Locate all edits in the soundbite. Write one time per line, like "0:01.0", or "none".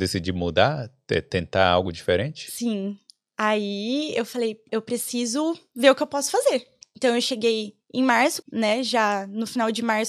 0:04.7
0:06.8
0:08.4